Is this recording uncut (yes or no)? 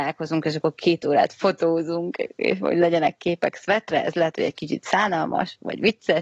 yes